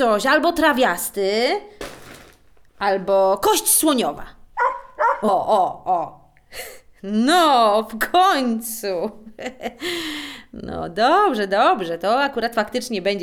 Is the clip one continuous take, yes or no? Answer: no